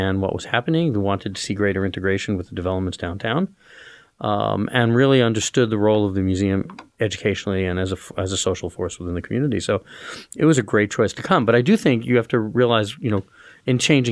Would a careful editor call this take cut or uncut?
uncut